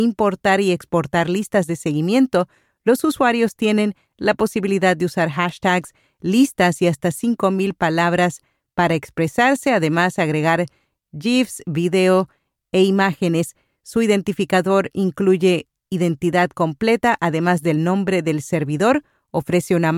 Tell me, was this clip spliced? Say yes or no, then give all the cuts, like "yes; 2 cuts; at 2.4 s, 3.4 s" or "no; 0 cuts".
no; 0 cuts